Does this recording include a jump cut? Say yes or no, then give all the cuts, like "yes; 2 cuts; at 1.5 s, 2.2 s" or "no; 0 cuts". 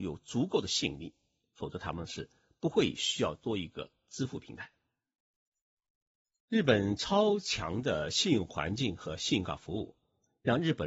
no; 0 cuts